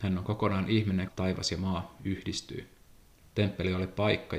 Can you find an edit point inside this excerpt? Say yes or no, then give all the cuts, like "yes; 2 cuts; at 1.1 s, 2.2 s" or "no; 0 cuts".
yes; 2 cuts; at 1.1 s, 3.2 s